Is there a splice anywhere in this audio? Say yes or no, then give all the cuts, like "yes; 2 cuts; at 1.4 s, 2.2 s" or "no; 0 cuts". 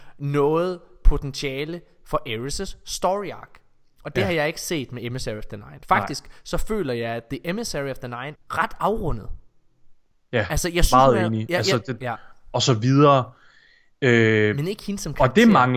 yes; 2 cuts; at 8.3 s, 12.0 s